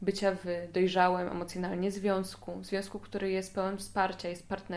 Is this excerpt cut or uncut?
uncut